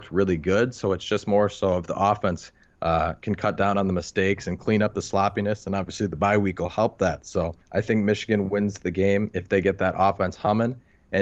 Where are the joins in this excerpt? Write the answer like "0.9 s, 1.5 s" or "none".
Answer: 7.6 s